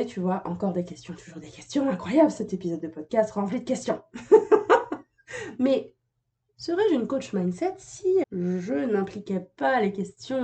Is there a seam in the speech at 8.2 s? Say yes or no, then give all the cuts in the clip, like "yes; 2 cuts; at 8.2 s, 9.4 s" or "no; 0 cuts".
yes; 1 cut; at 8.2 s